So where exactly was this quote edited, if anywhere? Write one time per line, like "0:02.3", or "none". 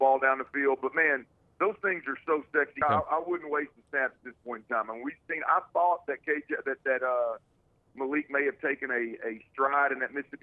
0:02.8

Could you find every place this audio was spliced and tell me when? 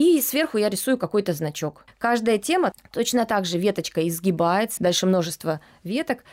0:01.9
0:04.8

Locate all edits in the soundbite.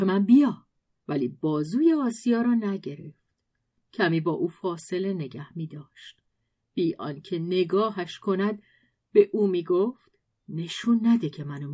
none

